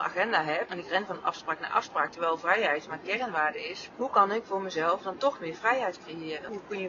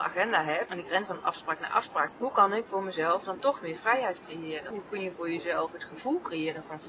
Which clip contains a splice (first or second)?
second